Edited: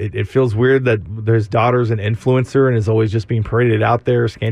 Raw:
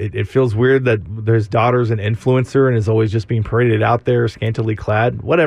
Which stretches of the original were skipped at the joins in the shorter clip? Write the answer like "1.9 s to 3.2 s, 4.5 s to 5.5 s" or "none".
none

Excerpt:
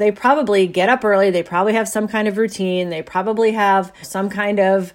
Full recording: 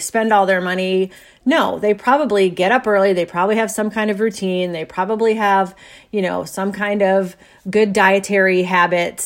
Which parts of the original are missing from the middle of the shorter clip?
5.8 s to 6.4 s

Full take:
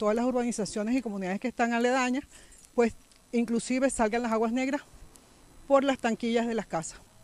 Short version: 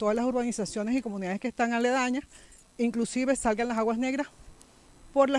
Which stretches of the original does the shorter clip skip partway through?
2.6 s to 3.2 s

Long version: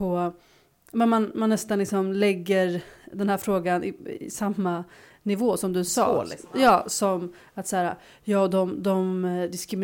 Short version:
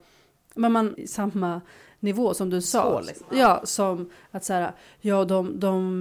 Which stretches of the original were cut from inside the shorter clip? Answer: 1.3 s to 4.2 s

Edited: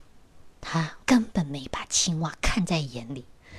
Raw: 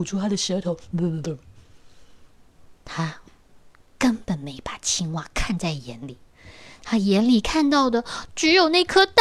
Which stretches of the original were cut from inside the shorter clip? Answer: 3.3 s to 3.9 s

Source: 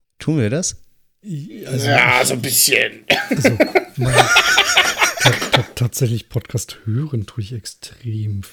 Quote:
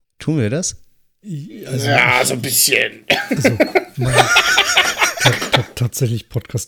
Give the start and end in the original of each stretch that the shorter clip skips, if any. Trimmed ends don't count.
none

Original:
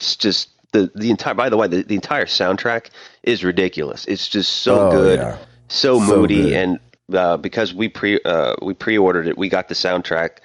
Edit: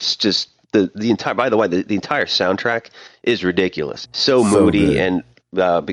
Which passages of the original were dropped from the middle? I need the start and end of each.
4.1 s to 5.6 s

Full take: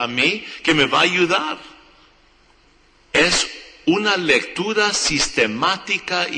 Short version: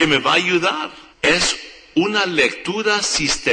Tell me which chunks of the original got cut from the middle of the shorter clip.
1.8 s to 3.0 s

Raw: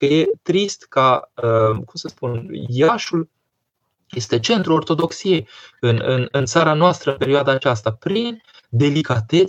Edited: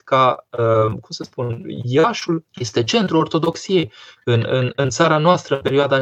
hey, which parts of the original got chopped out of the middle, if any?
3.3 s to 4.0 s

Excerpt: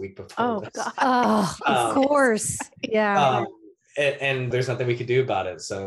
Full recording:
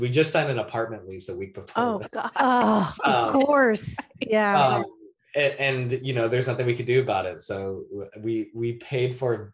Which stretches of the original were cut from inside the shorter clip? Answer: 5.9 s to 6.3 s

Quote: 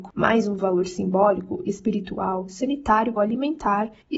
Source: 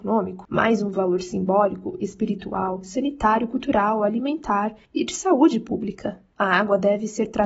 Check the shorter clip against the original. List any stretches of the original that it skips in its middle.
3.5 s to 4.0 s

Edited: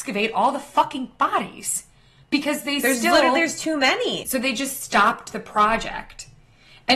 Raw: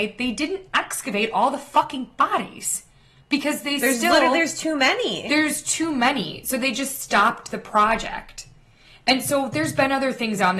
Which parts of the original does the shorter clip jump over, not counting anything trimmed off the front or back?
5.2 s to 6.4 s

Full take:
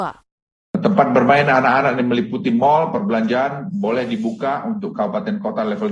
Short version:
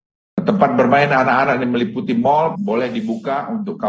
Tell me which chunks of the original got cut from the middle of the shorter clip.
2.9 s to 3.7 s

